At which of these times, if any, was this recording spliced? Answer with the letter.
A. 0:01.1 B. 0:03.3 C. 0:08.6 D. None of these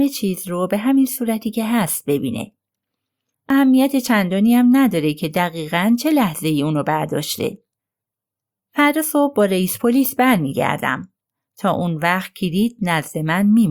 B